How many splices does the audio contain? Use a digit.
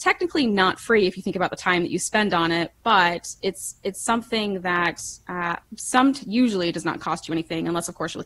1